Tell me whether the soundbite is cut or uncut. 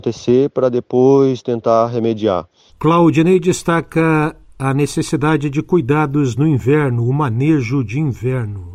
cut